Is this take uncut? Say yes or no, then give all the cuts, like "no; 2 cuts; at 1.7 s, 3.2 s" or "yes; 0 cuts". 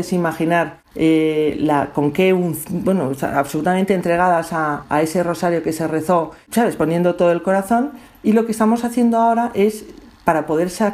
yes; 0 cuts